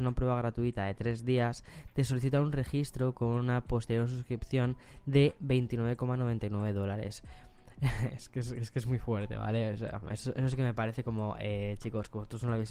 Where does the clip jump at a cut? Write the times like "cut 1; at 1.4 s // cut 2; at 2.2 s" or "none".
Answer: none